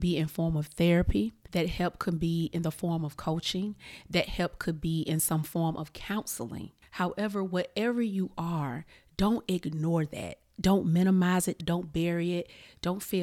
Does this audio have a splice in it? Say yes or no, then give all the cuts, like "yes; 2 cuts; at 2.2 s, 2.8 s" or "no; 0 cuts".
yes; 1 cut; at 11.6 s